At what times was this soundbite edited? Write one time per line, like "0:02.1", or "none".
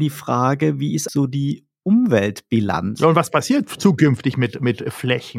0:01.1